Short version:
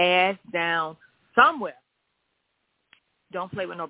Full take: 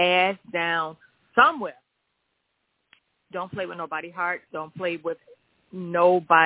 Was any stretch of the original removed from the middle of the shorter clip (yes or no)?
no